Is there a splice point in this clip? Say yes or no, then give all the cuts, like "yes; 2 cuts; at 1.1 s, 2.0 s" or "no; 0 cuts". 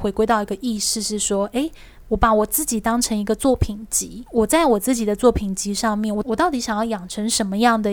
no; 0 cuts